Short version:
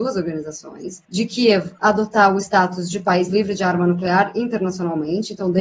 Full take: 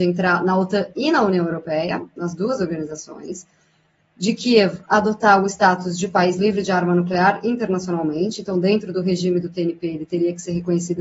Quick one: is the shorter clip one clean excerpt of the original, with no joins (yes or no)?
no